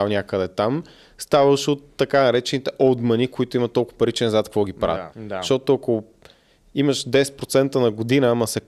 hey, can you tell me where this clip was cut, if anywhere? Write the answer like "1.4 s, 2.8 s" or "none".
5.1 s